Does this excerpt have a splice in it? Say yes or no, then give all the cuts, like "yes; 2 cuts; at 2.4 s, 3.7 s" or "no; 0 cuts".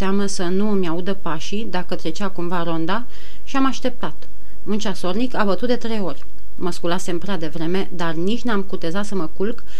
no; 0 cuts